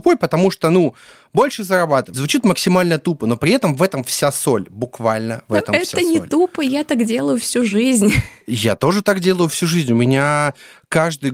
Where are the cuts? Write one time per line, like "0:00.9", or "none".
0:02.1